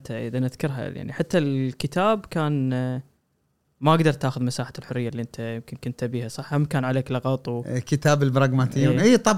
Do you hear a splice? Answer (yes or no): no